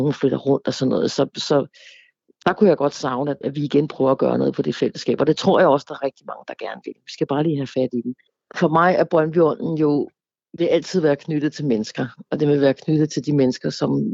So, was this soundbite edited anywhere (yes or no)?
yes